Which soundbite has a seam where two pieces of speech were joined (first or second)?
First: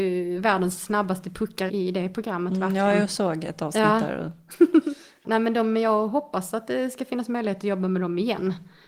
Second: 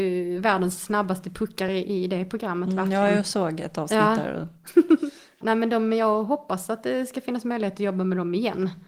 first